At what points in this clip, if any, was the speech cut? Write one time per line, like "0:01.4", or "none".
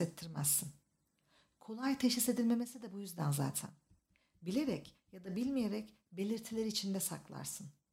none